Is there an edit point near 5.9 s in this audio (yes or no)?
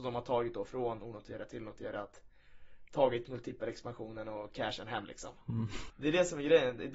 yes